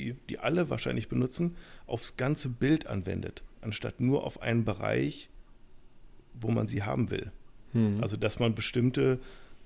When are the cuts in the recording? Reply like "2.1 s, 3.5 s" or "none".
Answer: none